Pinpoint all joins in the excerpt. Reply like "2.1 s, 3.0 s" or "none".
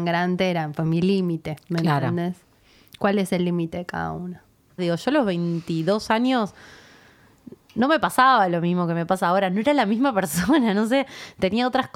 4.8 s